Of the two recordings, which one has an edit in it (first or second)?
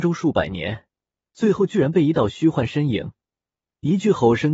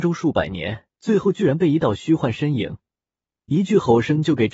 second